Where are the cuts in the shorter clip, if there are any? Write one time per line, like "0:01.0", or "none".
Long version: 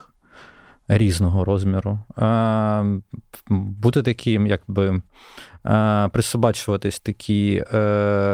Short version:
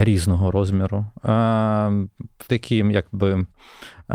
0:02.5